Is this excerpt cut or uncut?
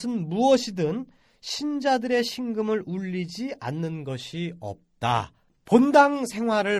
cut